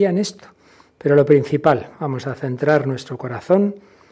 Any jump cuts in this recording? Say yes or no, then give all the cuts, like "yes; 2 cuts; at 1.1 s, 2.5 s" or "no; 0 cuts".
yes; 1 cut; at 0.9 s